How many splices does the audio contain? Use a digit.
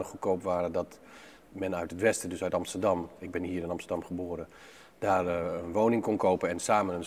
0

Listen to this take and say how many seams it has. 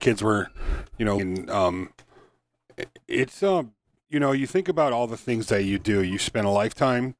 1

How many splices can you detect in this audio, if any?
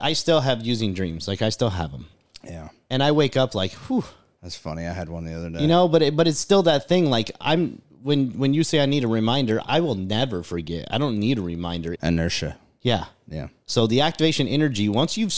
2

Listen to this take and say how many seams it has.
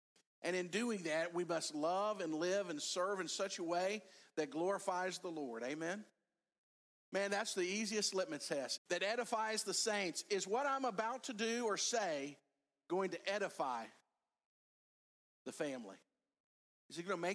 1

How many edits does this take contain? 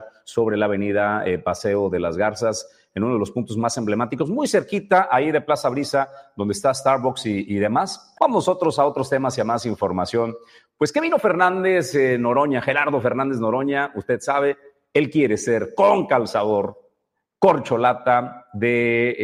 1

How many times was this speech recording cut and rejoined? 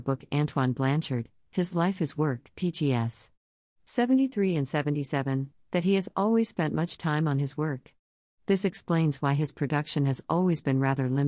0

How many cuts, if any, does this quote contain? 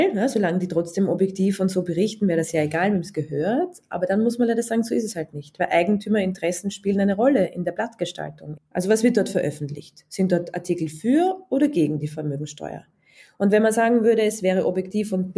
1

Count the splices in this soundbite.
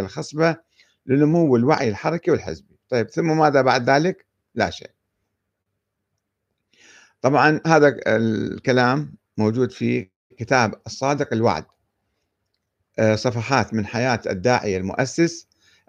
0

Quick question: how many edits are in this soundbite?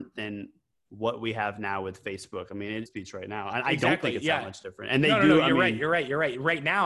1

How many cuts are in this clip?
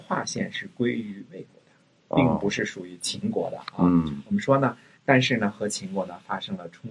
1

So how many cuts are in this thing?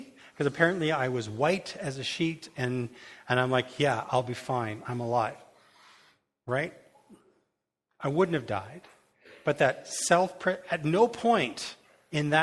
0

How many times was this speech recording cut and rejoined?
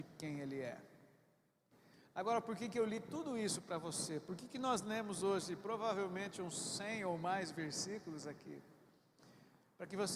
0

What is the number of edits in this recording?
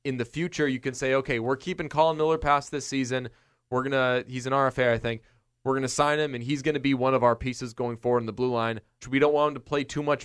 1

